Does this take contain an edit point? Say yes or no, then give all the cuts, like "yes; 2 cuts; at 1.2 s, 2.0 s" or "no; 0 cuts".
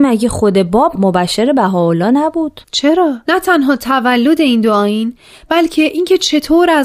yes; 1 cut; at 3.2 s